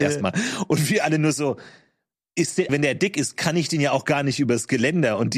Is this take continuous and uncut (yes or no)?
no